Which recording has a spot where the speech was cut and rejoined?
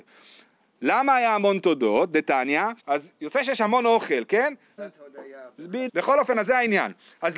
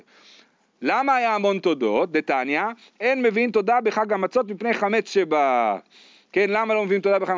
first; 3 cuts; at 2.8 s, 4.8 s, 5.9 s

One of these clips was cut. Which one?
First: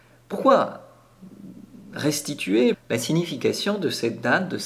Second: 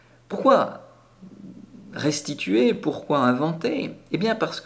first; 1 cut; at 2.7 s

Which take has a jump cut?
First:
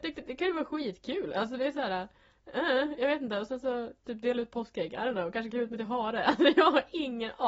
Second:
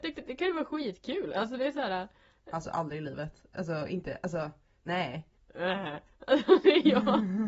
second; 2 cuts; at 2.5 s, 5.4 s

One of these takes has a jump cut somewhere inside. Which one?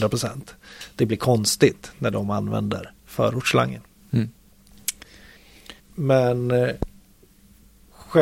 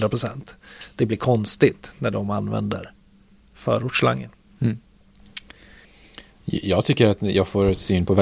first; 2 cuts; at 3.0 s, 5.8 s

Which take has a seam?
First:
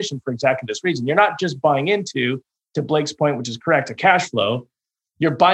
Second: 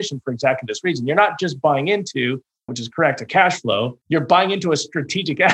second; 2 cuts; at 2.7 s, 4.0 s

